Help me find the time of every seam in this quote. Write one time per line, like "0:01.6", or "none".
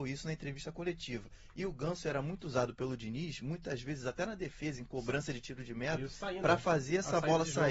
none